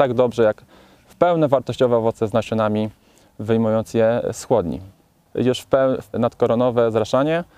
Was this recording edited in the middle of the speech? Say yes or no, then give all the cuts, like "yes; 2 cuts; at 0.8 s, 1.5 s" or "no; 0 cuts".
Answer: yes; 1 cut; at 6.1 s